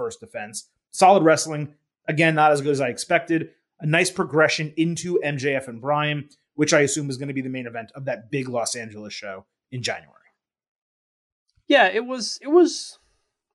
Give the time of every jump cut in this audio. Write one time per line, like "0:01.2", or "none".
none